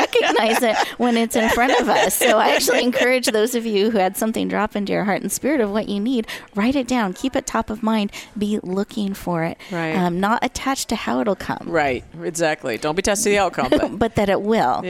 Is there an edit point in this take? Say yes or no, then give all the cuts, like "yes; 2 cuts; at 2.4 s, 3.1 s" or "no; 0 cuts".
no; 0 cuts